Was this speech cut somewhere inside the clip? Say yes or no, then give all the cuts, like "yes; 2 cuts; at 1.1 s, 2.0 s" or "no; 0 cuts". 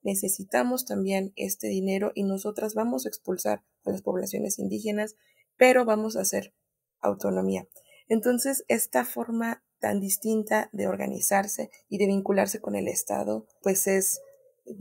no; 0 cuts